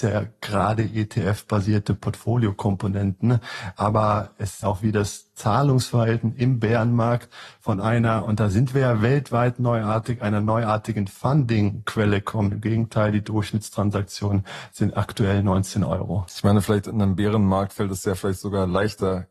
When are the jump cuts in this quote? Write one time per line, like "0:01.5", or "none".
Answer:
0:04.6
0:12.5